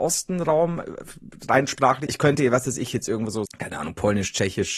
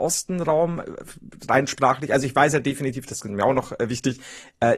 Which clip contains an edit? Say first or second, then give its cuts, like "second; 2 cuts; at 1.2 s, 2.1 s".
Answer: first; 2 cuts; at 2.1 s, 3.5 s